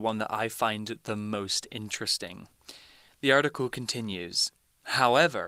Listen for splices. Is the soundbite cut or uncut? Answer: uncut